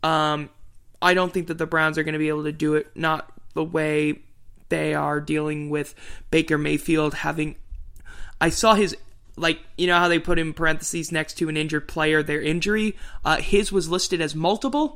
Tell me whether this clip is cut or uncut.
uncut